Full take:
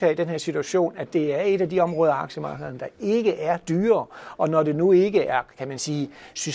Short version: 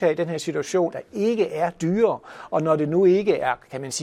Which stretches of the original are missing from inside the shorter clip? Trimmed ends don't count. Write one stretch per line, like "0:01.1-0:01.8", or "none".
0:00.9-0:02.8